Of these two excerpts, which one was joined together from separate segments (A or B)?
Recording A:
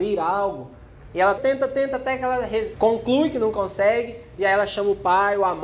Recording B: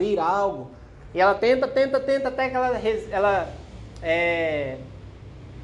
A